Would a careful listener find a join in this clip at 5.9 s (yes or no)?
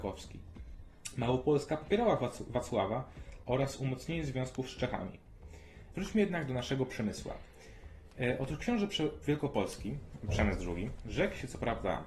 yes